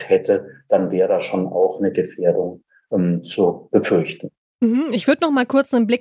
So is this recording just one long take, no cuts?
yes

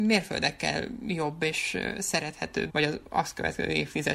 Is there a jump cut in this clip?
yes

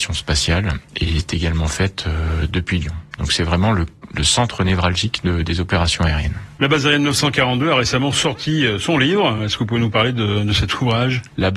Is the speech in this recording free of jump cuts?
yes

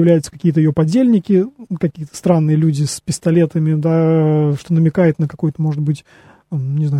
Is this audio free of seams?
yes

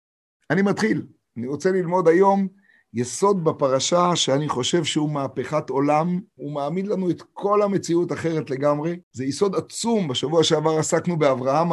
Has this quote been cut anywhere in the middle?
yes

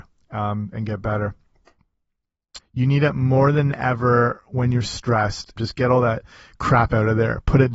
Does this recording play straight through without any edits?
no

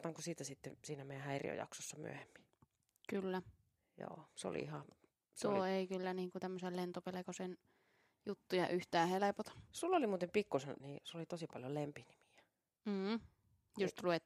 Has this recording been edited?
yes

